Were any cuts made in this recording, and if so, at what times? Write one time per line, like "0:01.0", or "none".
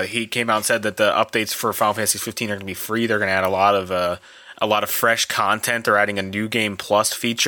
none